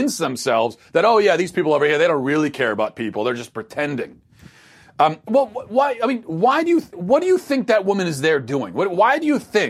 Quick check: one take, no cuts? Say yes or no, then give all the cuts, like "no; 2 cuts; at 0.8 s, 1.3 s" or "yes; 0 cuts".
no; 1 cut; at 6.9 s